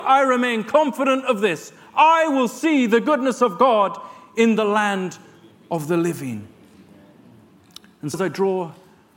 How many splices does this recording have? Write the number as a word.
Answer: one